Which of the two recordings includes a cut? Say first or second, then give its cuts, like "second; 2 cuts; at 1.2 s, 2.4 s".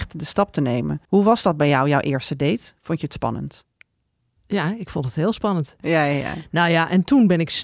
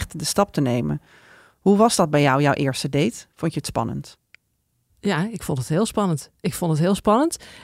first; 2 cuts; at 1.0 s, 5.8 s